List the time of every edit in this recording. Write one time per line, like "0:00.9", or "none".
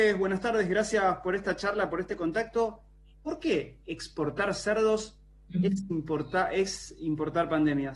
none